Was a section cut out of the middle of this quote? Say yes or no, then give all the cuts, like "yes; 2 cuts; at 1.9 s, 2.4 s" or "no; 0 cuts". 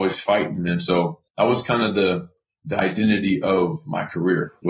yes; 2 cuts; at 1.3 s, 2.6 s